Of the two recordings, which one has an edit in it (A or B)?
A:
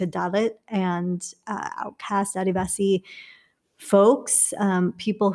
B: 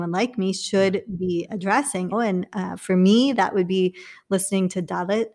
B